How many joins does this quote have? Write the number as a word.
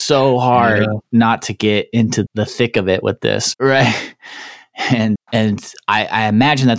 three